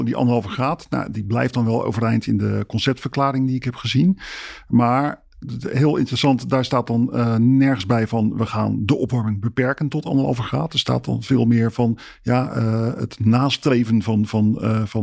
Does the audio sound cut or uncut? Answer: uncut